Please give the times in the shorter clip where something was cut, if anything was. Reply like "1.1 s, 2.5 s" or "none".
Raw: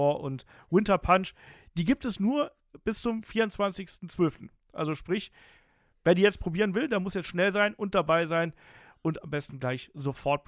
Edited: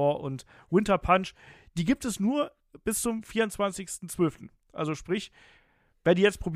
none